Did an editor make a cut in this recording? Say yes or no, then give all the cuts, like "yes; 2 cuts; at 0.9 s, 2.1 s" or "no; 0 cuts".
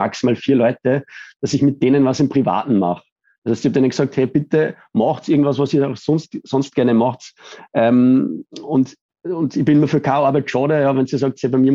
no; 0 cuts